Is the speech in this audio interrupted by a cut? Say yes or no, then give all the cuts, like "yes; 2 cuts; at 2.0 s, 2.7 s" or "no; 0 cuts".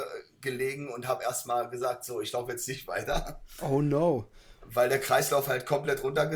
no; 0 cuts